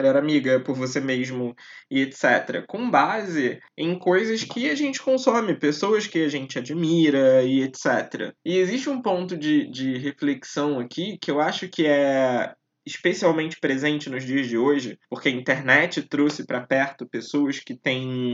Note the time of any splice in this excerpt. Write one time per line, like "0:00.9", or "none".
0:15.0